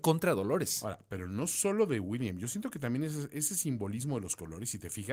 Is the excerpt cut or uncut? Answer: uncut